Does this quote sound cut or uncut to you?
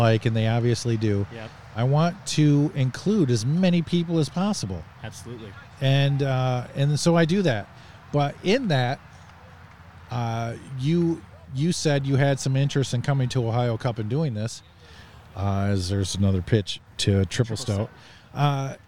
uncut